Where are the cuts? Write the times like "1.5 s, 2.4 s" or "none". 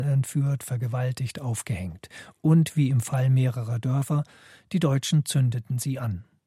none